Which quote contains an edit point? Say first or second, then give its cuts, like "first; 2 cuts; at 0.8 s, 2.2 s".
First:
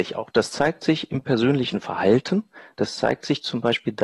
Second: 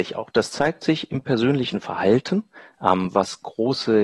second; 1 cut; at 2.7 s